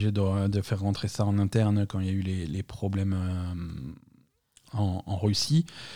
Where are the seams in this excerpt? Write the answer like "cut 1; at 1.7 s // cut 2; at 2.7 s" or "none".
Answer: none

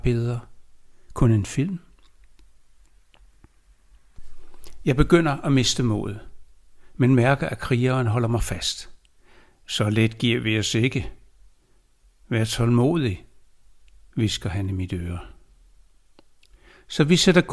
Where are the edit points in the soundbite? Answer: none

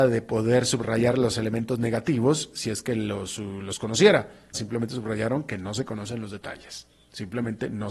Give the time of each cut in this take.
cut 1; at 4.5 s

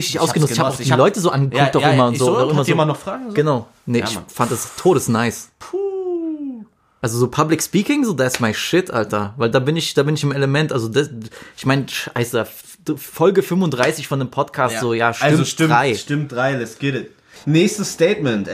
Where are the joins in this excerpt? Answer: cut 1; at 17.4 s

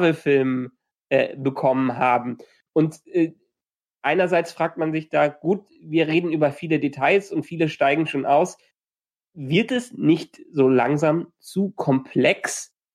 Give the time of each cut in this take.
none

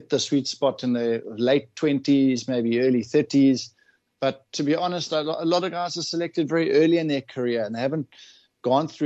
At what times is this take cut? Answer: cut 1; at 4.1 s

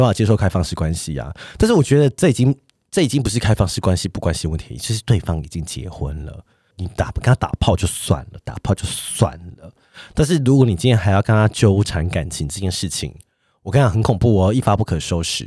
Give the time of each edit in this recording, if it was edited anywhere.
none

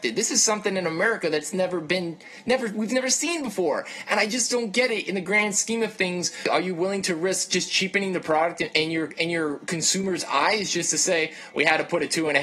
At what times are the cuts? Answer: cut 1; at 11.5 s

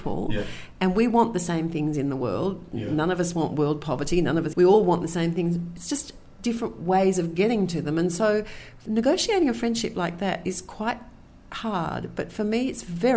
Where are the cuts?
cut 1; at 4.5 s

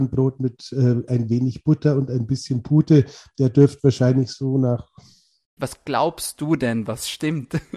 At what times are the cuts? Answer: cut 1; at 5.6 s

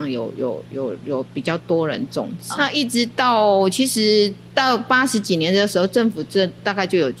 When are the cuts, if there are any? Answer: cut 1; at 2.6 s

